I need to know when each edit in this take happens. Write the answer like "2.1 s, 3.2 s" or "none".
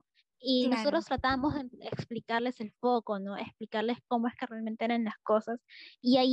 none

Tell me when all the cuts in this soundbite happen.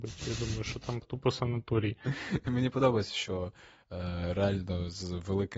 1.0 s

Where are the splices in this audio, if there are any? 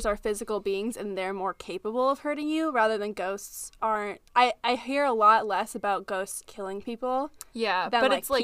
6.5 s

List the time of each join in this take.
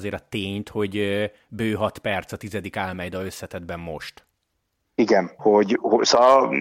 5.4 s

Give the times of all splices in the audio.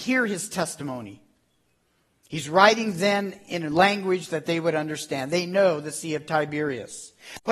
none

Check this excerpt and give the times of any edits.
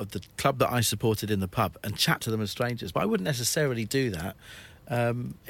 none

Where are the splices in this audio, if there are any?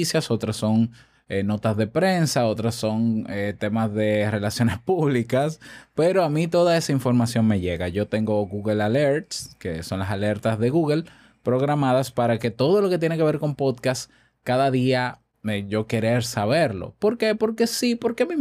none

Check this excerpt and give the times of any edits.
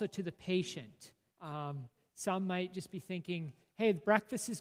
1.3 s

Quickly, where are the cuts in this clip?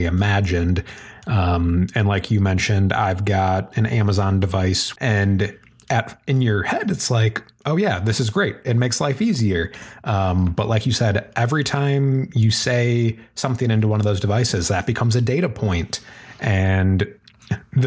5.0 s

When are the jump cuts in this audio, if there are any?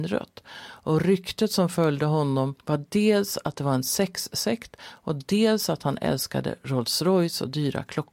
2.6 s

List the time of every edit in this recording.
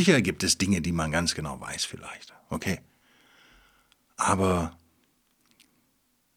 none

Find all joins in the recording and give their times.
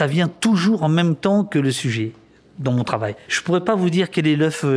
none

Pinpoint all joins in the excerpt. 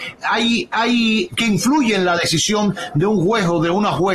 1.3 s

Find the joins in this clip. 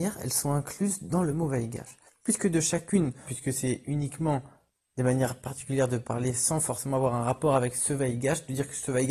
2.1 s, 3.2 s

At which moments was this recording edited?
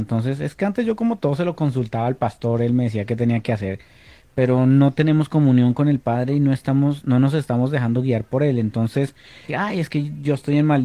9.5 s

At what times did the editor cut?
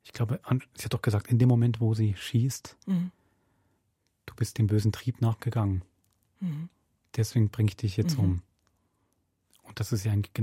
none

